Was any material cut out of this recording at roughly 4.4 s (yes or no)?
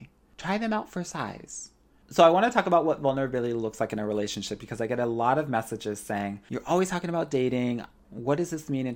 no